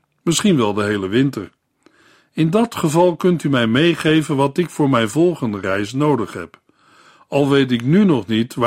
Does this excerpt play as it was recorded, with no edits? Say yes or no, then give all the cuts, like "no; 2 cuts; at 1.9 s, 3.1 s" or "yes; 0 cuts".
yes; 0 cuts